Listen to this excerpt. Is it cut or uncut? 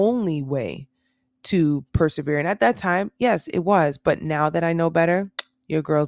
uncut